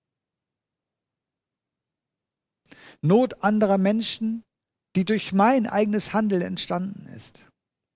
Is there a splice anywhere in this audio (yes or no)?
no